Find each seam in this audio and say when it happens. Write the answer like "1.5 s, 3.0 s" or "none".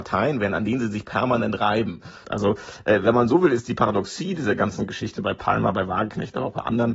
2.2 s